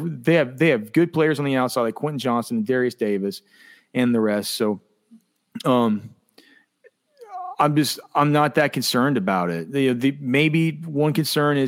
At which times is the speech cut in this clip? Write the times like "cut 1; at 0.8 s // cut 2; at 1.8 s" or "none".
none